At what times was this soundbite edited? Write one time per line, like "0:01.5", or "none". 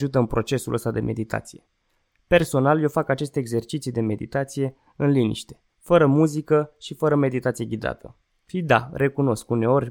0:08.3